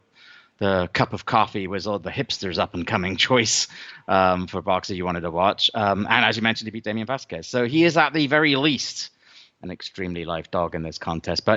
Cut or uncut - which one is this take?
uncut